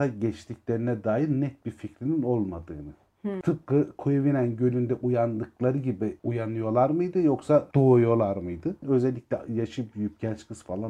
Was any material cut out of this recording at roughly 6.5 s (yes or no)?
no